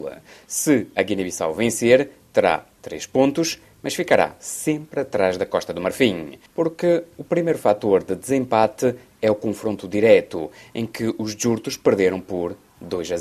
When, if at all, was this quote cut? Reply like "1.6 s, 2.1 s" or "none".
6.5 s